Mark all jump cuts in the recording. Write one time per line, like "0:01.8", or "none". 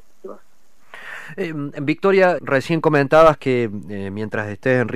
0:02.4